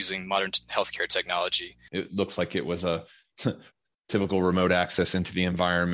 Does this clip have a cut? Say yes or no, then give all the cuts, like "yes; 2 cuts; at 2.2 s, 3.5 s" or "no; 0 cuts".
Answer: yes; 1 cut; at 1.9 s